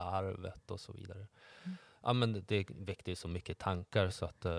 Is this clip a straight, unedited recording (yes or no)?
yes